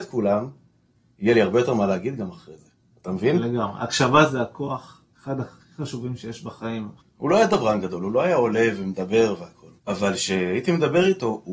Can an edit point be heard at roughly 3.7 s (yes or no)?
no